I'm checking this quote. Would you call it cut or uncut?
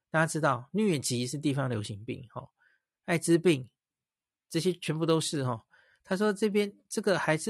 uncut